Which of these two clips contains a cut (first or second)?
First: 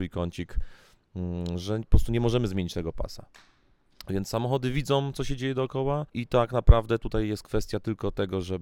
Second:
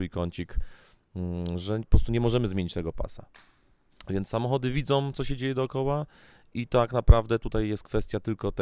first